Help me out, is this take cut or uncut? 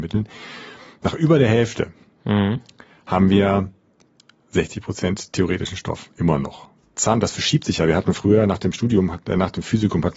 uncut